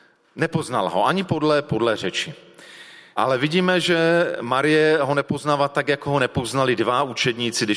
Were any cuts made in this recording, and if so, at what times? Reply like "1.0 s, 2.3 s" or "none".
3.1 s